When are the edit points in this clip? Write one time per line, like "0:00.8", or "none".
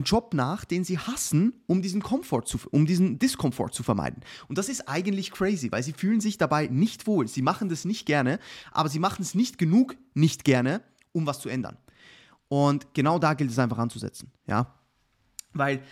none